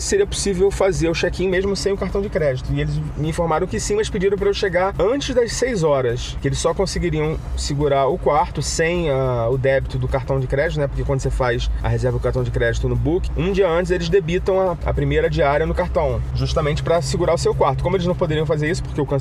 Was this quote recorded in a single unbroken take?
yes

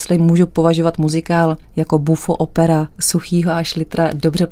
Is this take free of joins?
no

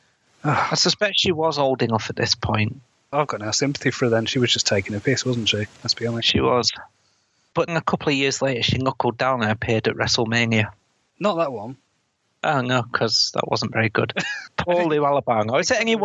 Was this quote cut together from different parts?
yes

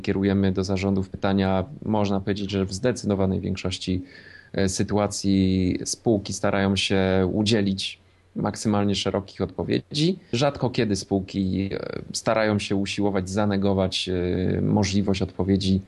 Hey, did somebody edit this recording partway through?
yes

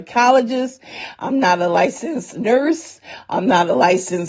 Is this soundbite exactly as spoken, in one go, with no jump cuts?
yes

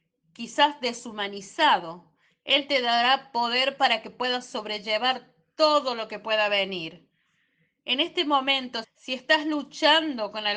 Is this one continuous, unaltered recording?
no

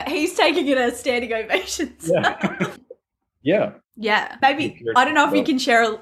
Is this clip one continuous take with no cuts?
no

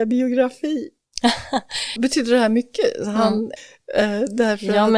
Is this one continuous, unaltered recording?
no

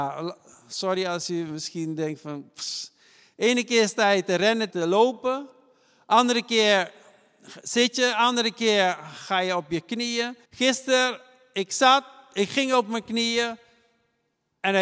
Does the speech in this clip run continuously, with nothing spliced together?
no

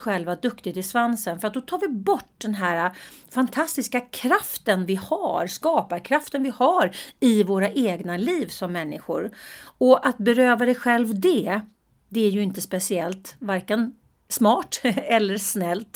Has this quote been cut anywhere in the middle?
no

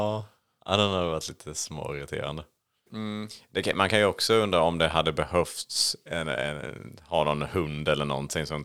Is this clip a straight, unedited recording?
no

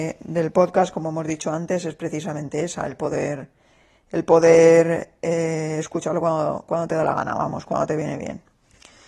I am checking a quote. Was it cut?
no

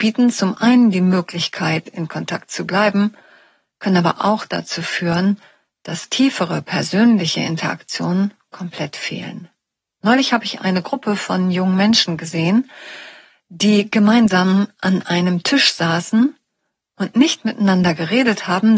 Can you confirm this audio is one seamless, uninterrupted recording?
yes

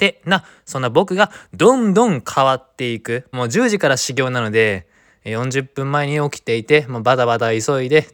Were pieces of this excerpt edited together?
yes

